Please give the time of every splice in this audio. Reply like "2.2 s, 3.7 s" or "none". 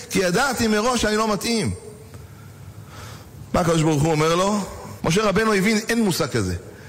5.0 s